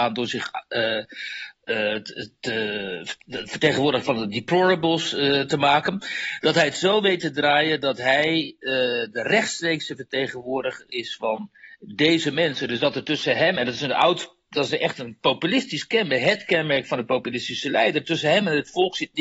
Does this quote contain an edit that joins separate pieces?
no; 0 cuts

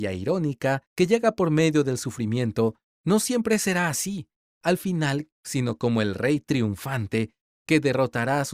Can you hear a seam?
yes; 1 cut; at 5.3 s

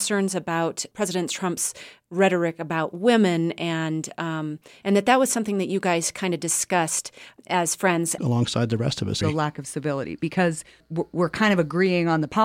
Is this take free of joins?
no; 3 cuts; at 4.8 s, 8.2 s, 9.2 s

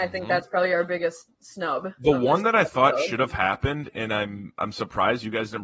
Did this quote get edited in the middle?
no; 0 cuts

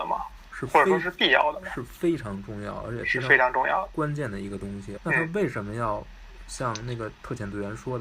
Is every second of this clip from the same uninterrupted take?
no; 1 cut; at 5.0 s

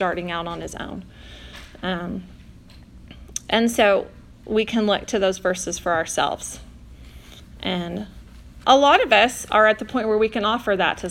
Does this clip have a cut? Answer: yes; 1 cut; at 8.6 s

